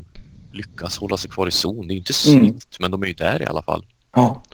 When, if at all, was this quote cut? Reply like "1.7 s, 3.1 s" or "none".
none